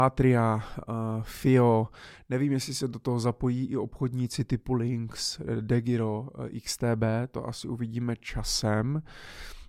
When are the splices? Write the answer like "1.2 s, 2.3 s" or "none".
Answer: none